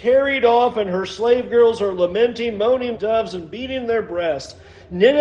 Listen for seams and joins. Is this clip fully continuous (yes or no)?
no